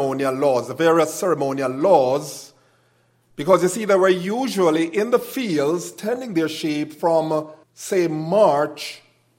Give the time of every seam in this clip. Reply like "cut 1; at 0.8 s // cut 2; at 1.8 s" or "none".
cut 1; at 7.6 s